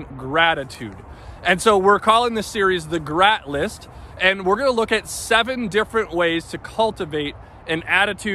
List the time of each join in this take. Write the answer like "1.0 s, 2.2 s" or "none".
none